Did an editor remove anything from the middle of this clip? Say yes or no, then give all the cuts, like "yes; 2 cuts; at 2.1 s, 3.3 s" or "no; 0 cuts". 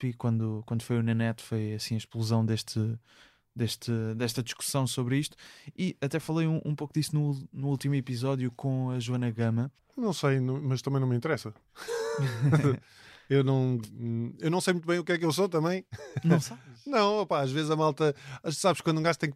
yes; 1 cut; at 9.8 s